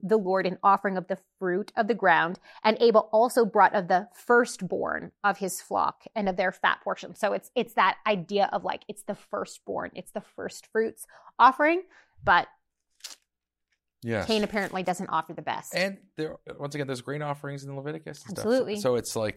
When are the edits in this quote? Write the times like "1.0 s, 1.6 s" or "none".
none